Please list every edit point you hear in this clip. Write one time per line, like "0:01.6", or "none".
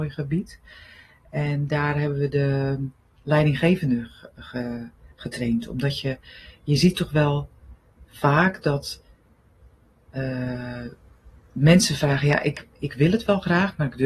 none

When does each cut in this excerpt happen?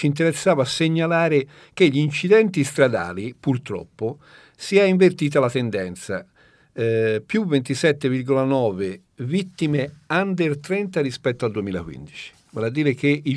none

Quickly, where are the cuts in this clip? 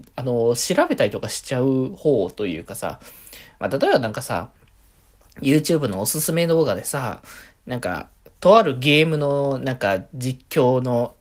none

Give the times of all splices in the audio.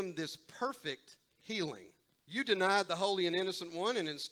0:02.2

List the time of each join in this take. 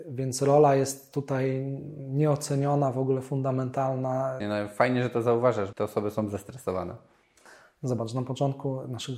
0:04.4
0:05.7

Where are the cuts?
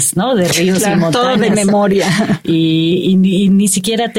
none

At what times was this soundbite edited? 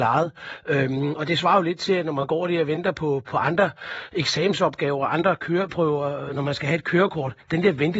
none

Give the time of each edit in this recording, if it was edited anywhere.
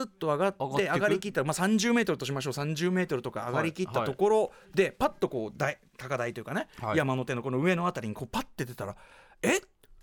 none

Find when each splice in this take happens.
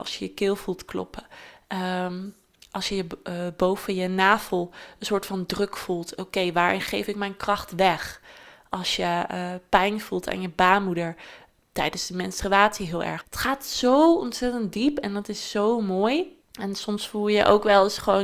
0:13.2
0:16.4

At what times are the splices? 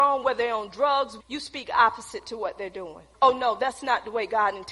0:01.2
0:03.1

